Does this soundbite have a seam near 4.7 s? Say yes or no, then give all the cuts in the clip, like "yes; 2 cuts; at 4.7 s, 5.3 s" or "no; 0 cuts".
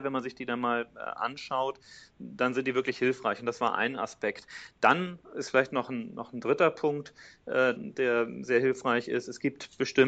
no; 1 cut; at 7.8 s